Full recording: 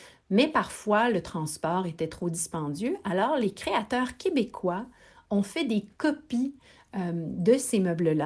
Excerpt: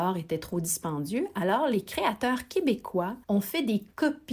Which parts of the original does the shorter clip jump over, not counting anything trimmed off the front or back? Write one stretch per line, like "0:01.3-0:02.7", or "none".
0:04.9-0:05.3